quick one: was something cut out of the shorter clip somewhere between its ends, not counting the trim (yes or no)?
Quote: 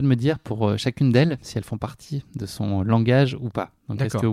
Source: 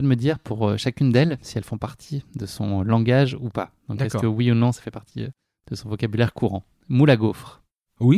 no